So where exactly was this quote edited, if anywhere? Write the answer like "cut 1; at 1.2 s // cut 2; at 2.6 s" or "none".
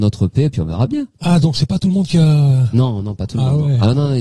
cut 1; at 1.1 s